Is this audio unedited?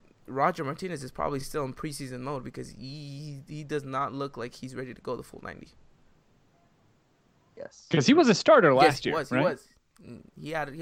yes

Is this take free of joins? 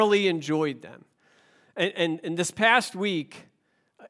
yes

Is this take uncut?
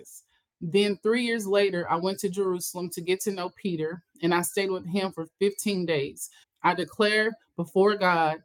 no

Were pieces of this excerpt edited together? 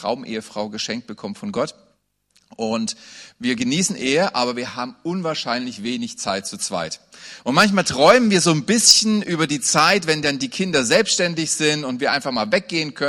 no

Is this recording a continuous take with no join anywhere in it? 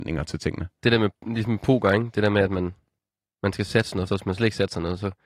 no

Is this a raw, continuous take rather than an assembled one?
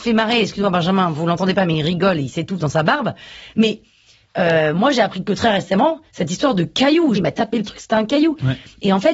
no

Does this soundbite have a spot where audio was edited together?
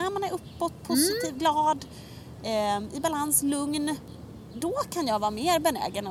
no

